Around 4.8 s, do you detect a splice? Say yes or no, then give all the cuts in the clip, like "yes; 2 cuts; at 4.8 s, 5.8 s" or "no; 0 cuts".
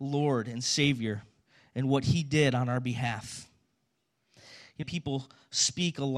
yes; 1 cut; at 4.8 s